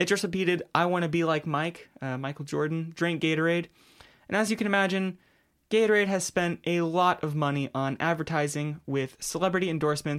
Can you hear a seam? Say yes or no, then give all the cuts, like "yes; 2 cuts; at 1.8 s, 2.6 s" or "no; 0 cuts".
no; 0 cuts